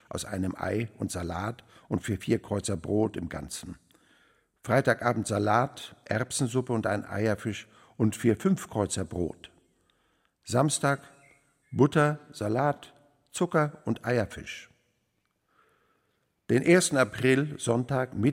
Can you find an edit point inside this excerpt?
no; 0 cuts

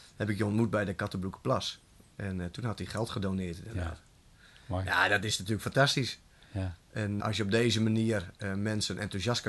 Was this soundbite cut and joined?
yes; 1 cut; at 7.2 s

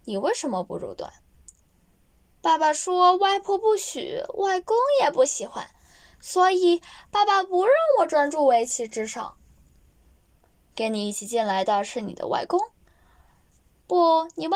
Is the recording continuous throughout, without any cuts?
yes; 0 cuts

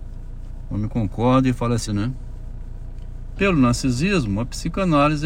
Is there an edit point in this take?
yes; 2 cuts; at 1.9 s, 3.4 s

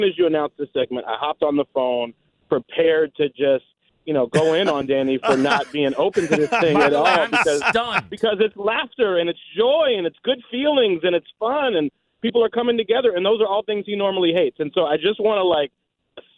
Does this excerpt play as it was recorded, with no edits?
yes; 0 cuts

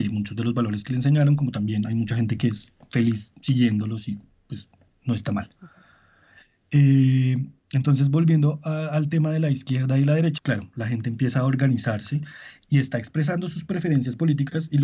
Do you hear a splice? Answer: yes; 1 cut; at 10.4 s

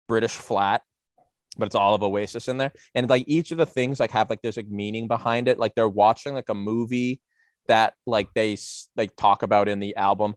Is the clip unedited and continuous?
yes; 0 cuts

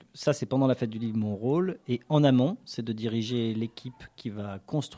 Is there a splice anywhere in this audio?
no; 0 cuts

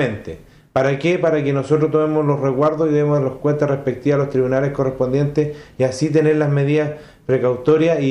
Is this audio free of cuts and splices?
yes; 0 cuts

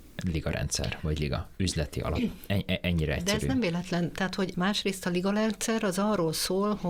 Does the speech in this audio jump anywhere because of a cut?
yes; 1 cut; at 4.5 s

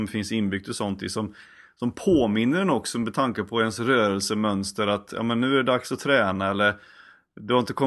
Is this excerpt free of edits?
yes; 0 cuts

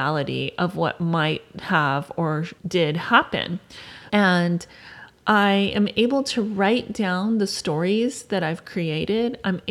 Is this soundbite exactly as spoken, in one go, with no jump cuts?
no; 2 cuts; at 2.6 s, 4.1 s

